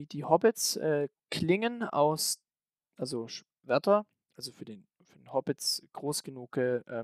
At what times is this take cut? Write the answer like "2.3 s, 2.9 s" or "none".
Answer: none